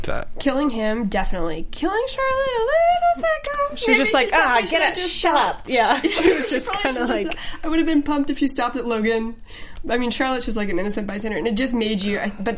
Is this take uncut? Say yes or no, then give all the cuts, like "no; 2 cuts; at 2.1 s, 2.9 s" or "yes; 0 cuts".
yes; 0 cuts